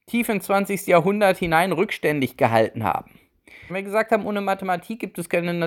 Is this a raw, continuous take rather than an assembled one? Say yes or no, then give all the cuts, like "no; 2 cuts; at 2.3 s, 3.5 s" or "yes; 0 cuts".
no; 1 cut; at 3.7 s